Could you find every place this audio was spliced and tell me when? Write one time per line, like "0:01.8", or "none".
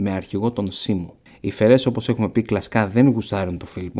0:01.3